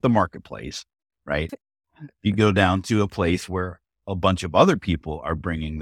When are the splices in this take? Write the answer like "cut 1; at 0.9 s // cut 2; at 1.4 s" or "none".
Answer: cut 1; at 1.5 s